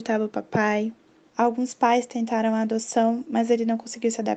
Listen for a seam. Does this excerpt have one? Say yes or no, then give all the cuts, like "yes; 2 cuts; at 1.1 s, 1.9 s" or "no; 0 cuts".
yes; 1 cut; at 1.3 s